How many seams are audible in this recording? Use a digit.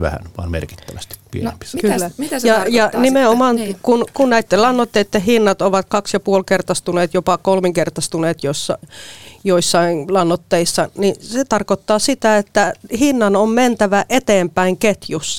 0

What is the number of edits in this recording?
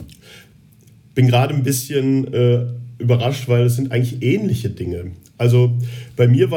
0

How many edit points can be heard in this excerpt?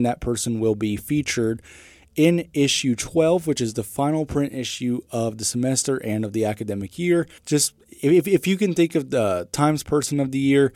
1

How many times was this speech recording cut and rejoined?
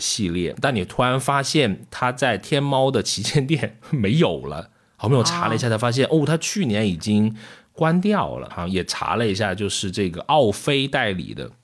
1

